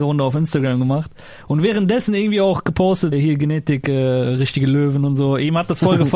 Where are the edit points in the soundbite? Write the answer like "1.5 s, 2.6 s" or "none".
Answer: 3.1 s